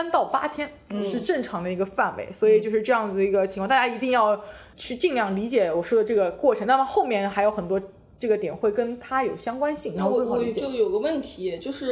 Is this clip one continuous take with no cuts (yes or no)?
yes